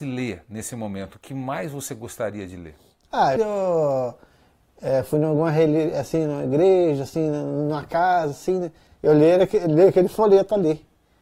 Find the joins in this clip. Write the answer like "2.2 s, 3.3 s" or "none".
3.4 s, 8.9 s